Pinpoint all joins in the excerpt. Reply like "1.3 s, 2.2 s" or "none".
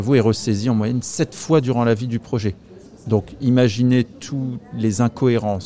none